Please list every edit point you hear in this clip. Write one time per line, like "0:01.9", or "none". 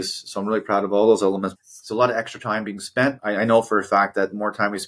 0:01.6
0:03.2

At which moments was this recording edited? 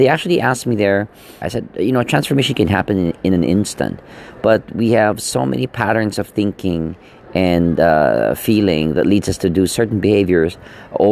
0:01.4

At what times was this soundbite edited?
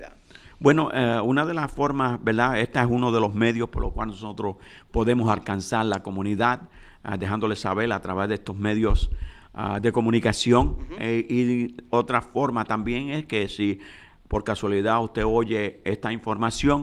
none

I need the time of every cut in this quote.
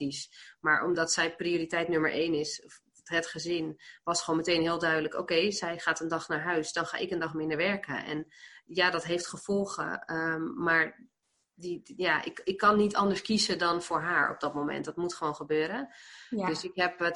none

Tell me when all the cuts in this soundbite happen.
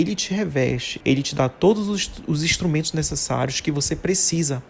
0:01.0

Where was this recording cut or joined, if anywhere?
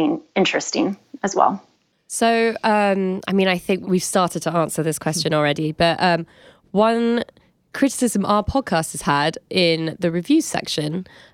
none

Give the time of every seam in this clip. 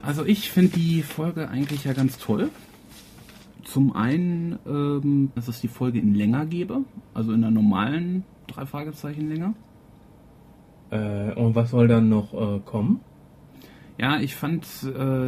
0:05.4

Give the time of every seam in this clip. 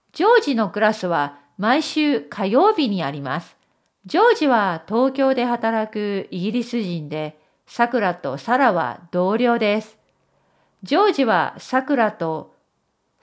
0:03.8

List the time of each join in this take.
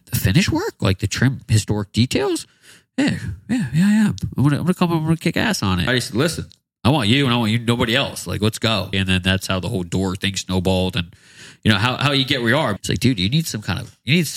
0:05.9
0:08.9
0:12.8

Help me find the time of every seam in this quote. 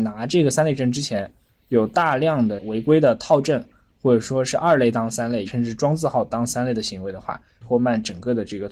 0:05.5
0:07.6

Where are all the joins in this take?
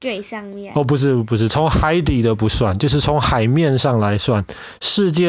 none

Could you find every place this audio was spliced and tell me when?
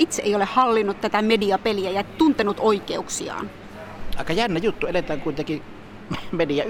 none

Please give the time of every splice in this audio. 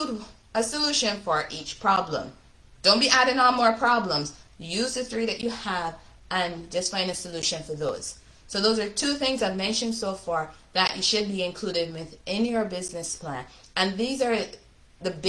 none

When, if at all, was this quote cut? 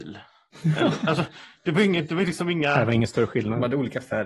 none

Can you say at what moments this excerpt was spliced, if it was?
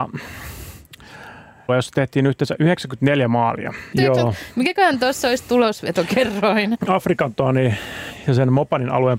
0:01.7
0:03.9
0:06.8

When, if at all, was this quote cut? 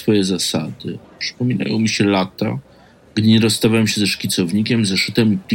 0:01.0

